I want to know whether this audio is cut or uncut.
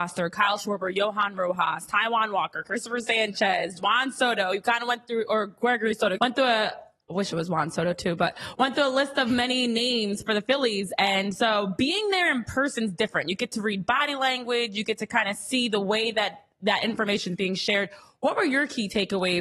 cut